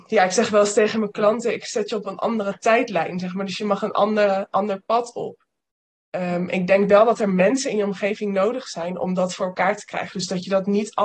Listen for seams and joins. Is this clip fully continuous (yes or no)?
yes